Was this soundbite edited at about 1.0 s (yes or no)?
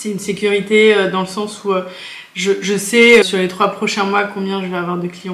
no